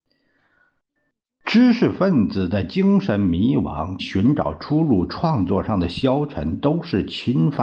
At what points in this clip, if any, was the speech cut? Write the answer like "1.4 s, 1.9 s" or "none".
4.0 s